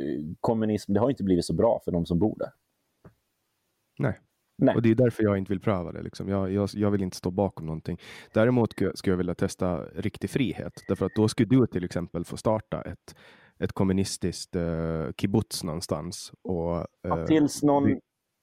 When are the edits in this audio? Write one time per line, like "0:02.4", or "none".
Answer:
none